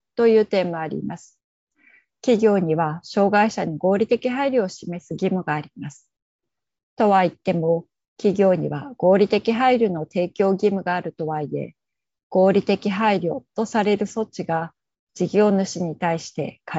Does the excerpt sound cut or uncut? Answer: uncut